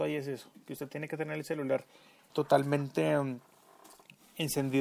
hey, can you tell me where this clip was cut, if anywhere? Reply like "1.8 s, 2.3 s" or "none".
2.3 s